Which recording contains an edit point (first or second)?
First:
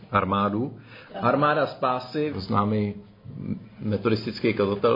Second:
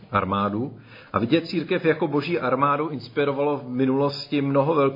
first